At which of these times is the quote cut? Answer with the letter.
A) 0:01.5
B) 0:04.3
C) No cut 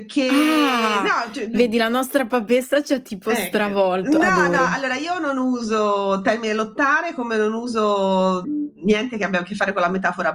C